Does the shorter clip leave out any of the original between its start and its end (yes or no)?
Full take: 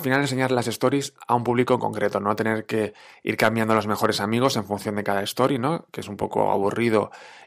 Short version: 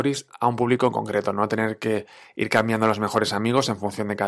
no